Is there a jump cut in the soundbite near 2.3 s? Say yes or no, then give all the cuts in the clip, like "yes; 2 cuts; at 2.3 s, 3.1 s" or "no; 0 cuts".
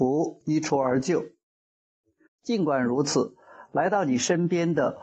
yes; 1 cut; at 2.3 s